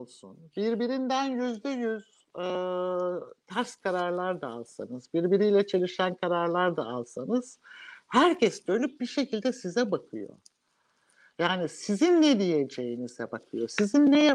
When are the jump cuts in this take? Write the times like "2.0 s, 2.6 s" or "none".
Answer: none